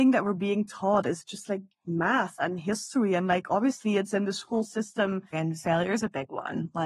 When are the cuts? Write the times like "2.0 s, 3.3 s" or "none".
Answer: 5.3 s